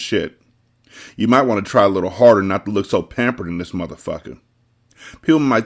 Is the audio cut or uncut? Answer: uncut